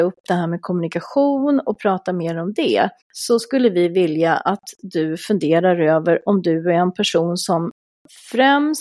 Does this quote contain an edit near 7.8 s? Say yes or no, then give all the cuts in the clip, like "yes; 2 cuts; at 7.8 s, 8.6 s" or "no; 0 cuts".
no; 1 cut; at 3.0 s